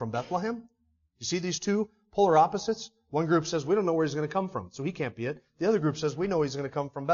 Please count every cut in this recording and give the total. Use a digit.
0